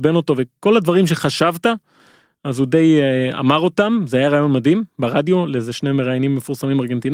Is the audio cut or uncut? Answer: uncut